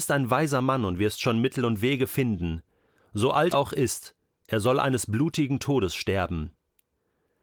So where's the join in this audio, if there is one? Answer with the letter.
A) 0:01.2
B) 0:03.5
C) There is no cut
B